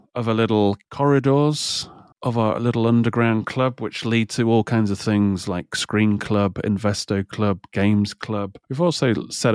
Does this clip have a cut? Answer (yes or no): yes